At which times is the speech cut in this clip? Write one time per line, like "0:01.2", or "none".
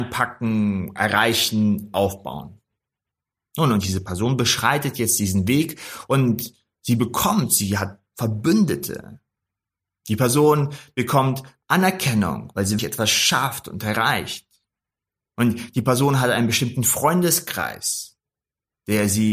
0:12.8